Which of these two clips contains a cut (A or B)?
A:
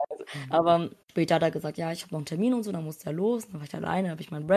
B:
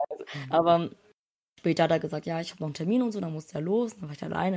A